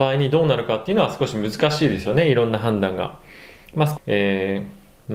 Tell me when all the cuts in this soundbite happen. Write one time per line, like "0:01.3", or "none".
0:04.0